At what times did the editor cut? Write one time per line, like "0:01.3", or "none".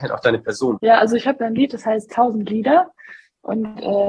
none